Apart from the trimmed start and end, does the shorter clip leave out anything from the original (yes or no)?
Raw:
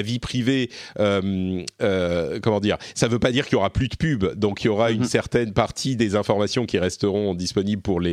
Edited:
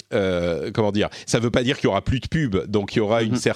no